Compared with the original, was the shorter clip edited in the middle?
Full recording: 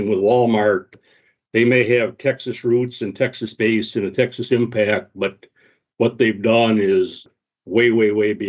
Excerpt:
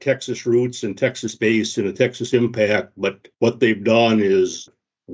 yes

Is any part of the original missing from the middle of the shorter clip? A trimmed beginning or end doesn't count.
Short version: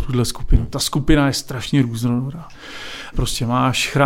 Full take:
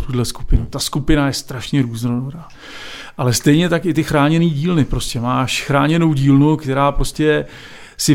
yes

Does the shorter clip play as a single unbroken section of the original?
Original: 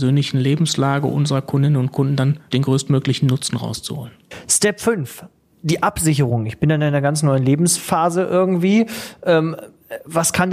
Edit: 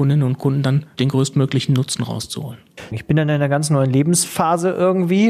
no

